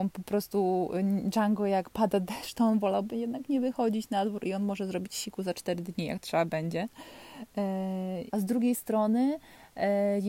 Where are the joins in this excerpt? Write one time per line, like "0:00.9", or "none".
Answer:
0:08.3